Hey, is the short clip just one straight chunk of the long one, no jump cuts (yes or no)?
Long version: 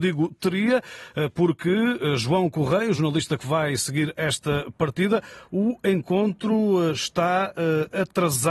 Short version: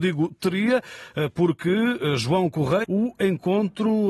no